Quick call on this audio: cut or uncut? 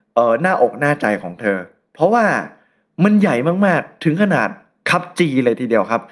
uncut